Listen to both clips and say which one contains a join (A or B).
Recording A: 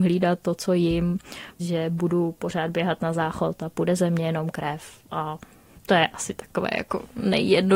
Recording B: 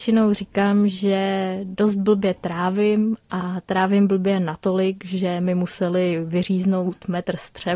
A